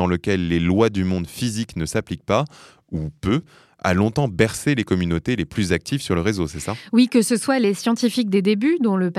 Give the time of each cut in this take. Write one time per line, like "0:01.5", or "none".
none